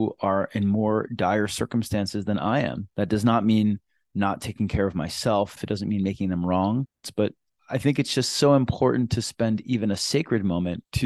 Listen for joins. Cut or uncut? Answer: cut